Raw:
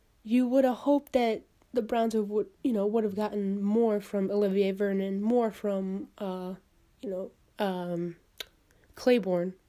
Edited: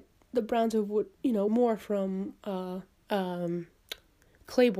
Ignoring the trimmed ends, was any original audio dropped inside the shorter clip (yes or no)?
yes